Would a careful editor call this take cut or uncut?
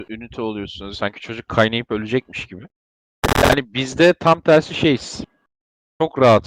cut